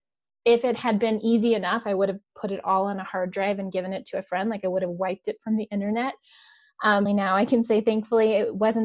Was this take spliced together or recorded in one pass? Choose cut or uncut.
cut